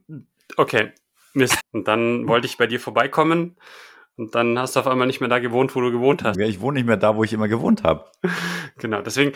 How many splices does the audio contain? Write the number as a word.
two